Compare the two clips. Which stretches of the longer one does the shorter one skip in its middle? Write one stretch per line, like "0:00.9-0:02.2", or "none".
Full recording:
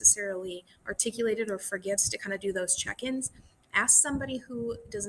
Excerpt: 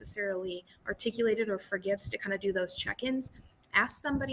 none

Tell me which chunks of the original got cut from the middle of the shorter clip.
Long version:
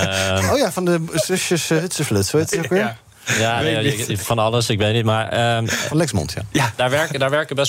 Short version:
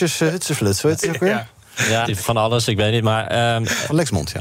0:03.5-0:04.1

